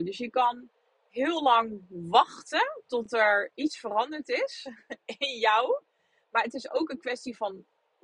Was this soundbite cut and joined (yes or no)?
no